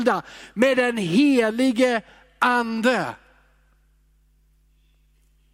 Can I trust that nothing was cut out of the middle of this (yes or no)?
yes